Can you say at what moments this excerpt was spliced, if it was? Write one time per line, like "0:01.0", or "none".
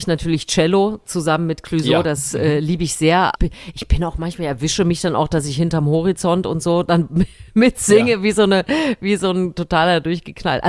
0:03.4